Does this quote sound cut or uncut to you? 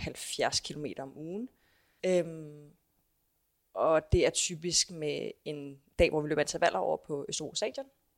cut